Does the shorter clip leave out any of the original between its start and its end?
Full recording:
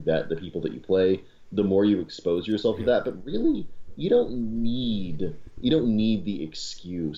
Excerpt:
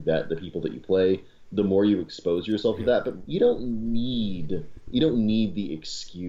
yes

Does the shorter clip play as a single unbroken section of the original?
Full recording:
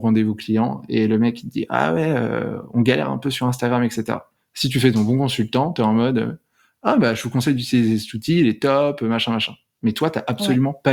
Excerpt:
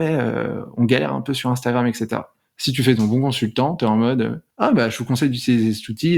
no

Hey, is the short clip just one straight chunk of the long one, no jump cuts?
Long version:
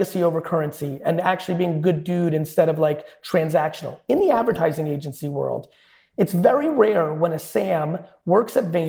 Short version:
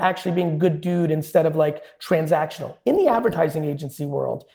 yes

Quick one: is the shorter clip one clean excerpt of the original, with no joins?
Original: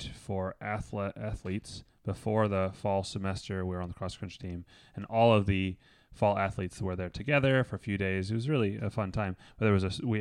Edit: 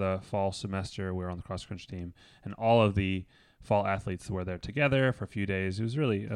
yes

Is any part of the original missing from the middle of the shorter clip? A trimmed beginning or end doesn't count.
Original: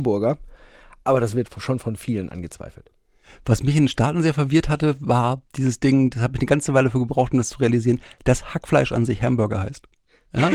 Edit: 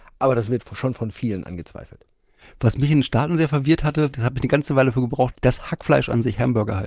yes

